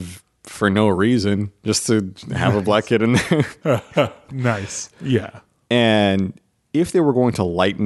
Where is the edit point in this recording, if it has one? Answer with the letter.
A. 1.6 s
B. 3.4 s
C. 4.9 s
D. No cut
C